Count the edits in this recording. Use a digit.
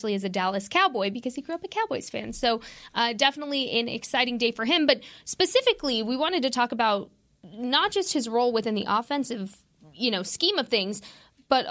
0